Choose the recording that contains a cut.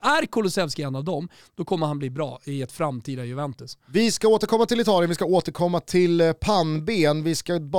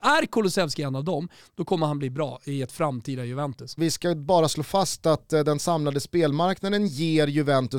second; 1 cut; at 3.8 s

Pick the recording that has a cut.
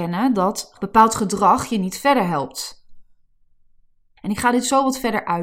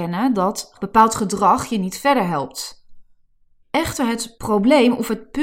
second; 1 cut; at 3.6 s

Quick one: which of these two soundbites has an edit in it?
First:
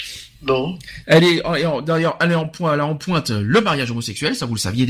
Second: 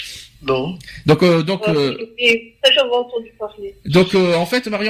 first; 1 cut; at 1.0 s

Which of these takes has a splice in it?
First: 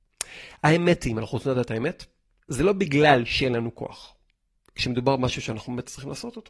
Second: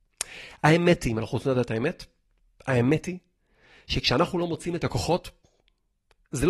first; 1 cut; at 2.4 s

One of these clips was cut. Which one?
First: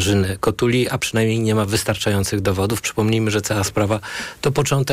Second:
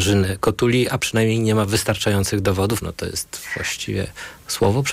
second; 1 cut; at 2.8 s

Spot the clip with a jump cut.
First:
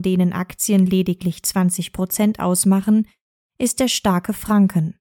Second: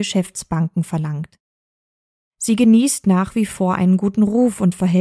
second; 1 cut; at 2.2 s

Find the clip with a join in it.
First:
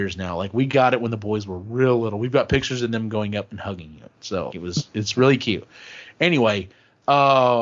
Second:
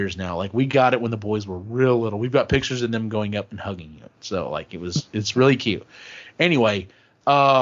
first; 1 cut; at 4.5 s

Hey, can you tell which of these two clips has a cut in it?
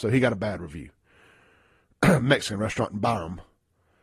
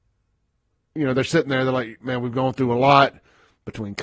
second; 1 cut; at 0.9 s

